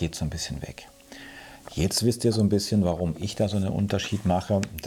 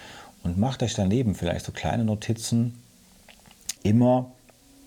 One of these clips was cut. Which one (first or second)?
second